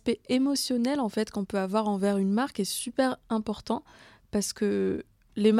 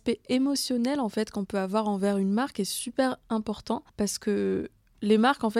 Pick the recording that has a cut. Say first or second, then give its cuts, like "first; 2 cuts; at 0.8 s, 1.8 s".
second; 1 cut; at 3.9 s